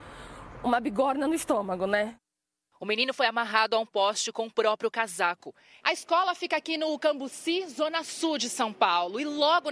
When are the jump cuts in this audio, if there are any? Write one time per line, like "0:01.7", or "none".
0:05.8